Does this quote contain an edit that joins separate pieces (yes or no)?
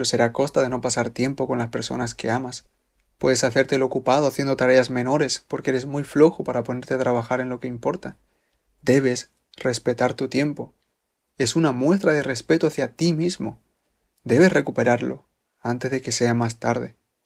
no